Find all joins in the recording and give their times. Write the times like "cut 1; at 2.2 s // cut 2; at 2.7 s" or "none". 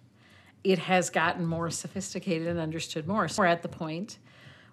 cut 1; at 3.4 s